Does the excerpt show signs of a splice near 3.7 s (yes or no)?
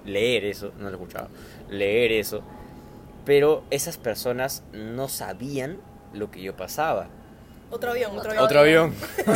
yes